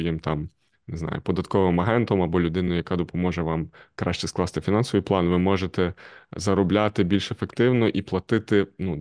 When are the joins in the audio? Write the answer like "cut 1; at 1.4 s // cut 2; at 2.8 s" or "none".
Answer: none